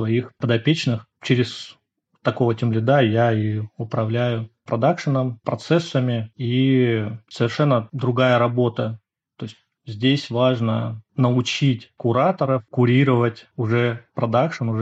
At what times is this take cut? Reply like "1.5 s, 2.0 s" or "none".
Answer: none